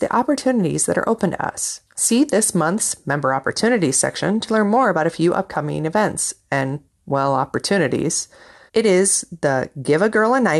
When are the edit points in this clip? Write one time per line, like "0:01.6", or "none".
0:01.9
0:08.7